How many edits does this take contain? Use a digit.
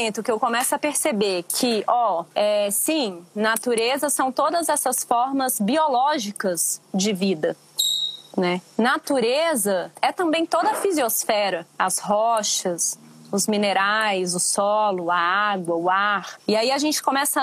1